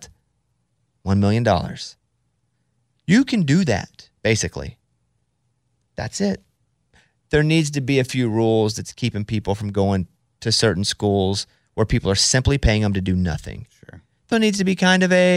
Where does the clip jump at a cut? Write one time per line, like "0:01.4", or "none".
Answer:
0:04.2
0:14.3